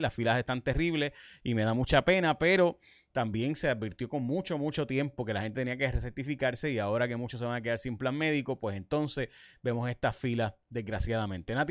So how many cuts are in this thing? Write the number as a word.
zero